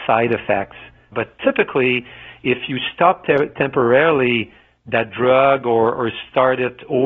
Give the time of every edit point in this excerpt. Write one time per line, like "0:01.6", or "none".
0:01.1